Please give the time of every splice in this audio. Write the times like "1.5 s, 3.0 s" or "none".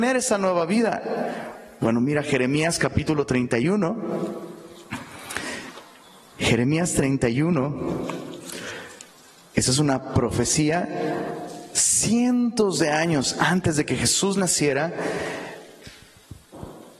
none